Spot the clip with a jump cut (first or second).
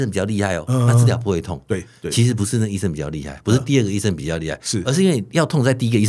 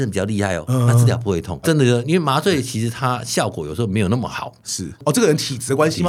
second